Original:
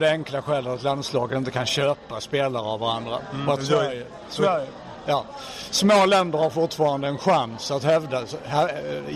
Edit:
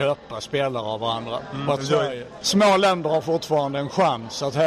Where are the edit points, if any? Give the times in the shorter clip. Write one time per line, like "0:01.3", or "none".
0:02.4